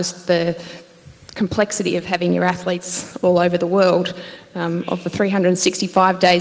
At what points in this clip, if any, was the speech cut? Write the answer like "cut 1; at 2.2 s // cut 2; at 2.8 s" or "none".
none